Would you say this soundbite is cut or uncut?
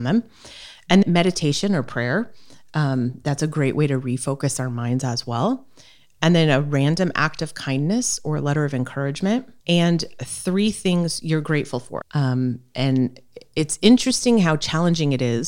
cut